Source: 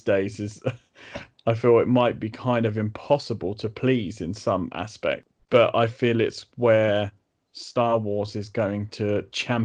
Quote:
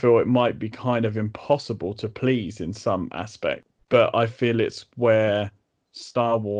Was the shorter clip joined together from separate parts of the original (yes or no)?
no